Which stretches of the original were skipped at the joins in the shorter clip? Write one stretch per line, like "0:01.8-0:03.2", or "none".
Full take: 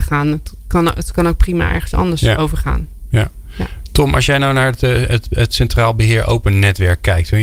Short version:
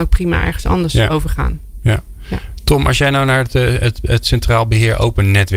none